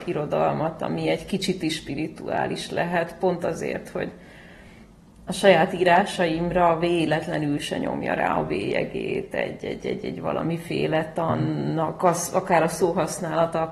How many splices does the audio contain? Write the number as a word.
zero